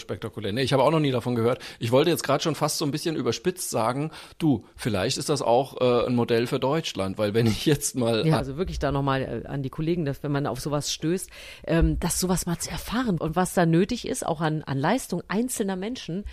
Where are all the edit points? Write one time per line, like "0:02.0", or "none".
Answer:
0:08.4
0:13.2